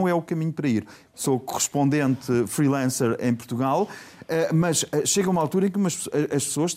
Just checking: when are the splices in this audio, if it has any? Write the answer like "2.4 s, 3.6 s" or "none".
1.1 s